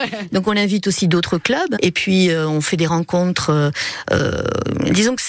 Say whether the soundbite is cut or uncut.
cut